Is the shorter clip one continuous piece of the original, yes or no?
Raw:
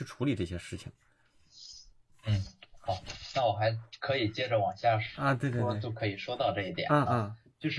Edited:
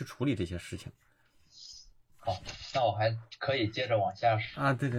no